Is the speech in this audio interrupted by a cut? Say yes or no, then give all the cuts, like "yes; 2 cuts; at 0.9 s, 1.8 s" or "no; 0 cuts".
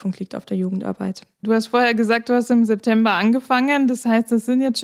yes; 1 cut; at 1.4 s